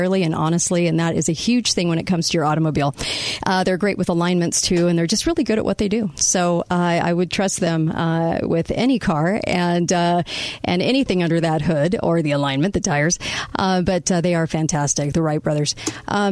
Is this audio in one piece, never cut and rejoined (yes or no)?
yes